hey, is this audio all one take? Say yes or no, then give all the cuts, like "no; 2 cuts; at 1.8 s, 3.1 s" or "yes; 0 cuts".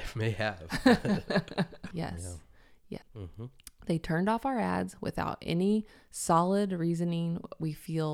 no; 2 cuts; at 1.9 s, 3.0 s